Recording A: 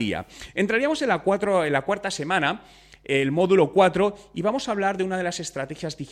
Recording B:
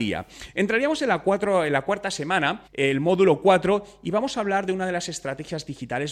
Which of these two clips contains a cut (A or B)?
B